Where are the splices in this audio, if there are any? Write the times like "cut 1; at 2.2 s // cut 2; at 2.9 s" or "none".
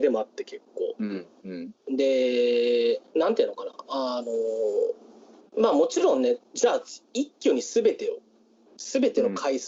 cut 1; at 3.1 s

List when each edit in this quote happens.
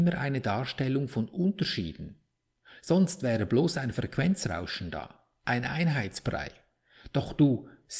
none

